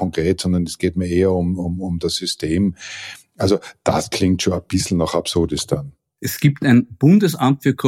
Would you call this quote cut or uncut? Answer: uncut